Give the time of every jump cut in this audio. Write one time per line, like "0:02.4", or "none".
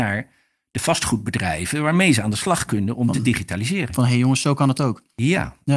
none